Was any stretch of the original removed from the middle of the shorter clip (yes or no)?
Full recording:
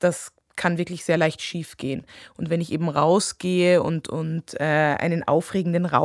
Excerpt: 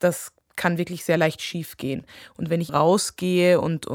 yes